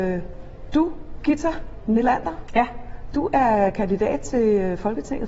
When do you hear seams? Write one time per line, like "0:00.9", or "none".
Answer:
none